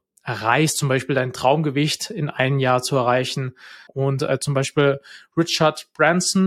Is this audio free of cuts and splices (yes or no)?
no